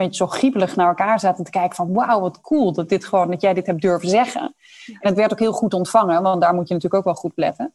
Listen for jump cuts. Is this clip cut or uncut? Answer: uncut